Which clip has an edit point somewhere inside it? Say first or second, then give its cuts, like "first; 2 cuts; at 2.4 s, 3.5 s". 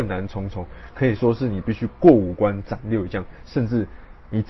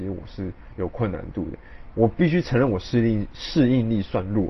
second; 1 cut; at 1.9 s